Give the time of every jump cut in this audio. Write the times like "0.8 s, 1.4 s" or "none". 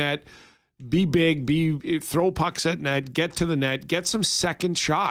none